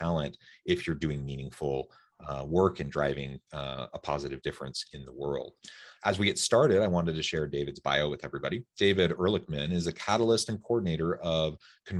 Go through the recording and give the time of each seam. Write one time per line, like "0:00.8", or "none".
none